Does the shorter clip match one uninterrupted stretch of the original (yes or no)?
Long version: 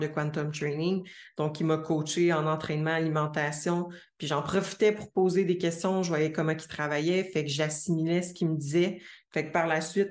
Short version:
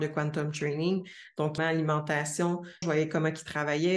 no